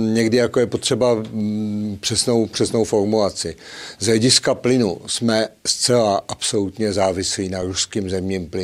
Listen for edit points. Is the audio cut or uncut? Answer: uncut